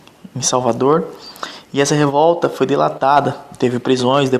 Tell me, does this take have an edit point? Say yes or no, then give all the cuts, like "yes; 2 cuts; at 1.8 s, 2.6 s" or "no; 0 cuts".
no; 0 cuts